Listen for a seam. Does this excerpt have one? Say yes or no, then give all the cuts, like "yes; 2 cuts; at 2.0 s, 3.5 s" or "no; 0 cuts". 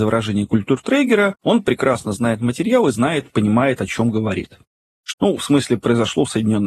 yes; 1 cut; at 5.1 s